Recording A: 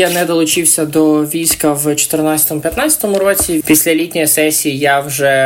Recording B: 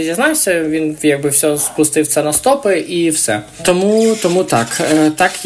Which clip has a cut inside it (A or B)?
A